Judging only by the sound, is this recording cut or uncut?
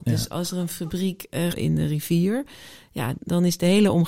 cut